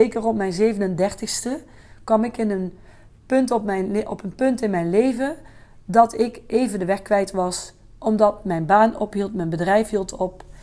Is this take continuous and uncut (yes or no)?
yes